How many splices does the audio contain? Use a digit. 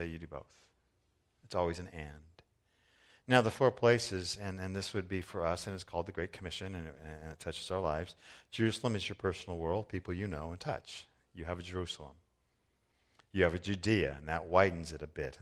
0